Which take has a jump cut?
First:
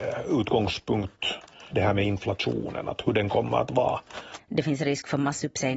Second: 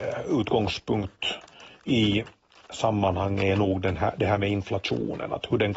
first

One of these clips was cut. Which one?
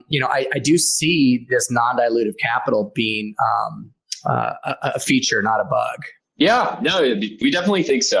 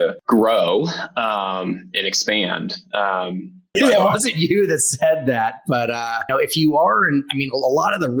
second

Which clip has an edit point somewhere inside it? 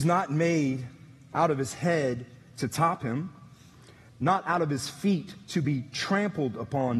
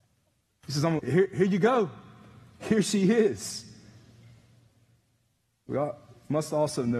second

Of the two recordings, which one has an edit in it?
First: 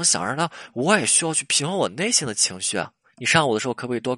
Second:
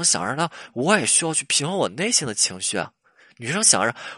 first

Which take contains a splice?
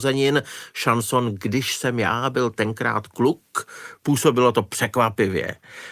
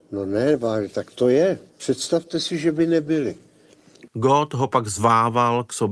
second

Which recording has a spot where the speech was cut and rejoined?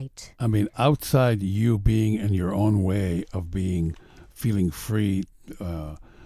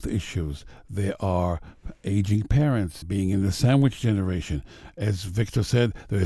second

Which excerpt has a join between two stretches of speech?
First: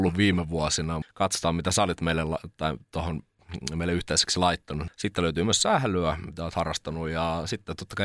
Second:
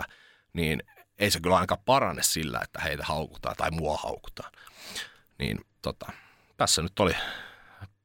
first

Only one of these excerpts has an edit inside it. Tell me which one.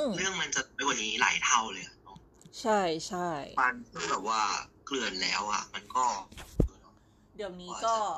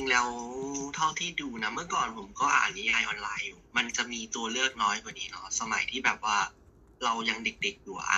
first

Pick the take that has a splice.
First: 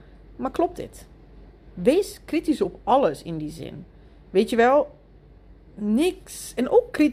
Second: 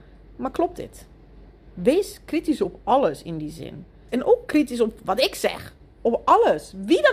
second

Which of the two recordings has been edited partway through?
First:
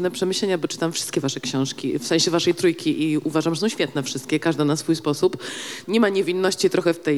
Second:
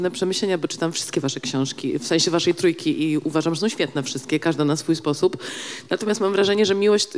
first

